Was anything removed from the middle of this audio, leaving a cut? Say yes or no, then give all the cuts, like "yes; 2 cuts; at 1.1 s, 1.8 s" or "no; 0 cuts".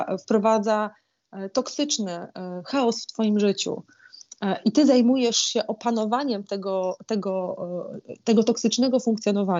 no; 0 cuts